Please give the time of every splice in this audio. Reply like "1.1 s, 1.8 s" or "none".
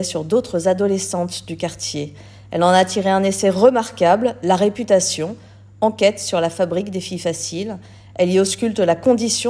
none